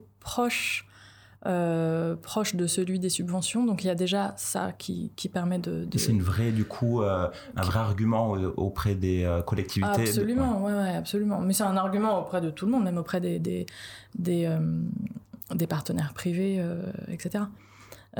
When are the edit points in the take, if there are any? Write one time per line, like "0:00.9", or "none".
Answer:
none

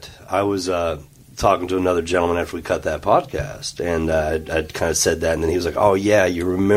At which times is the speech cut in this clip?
none

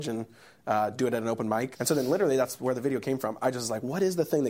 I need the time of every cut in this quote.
0:01.8

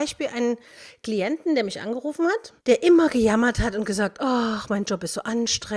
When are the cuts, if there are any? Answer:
0:02.6

